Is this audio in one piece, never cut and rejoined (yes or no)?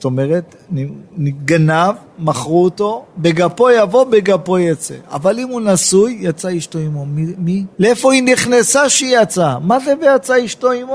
no